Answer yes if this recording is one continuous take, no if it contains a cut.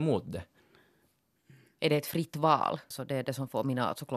no